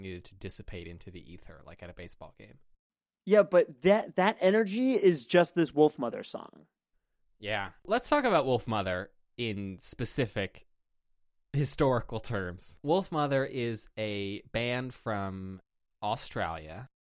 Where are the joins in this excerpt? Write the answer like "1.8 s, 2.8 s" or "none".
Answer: 7.8 s